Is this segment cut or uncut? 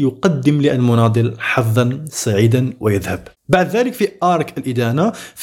cut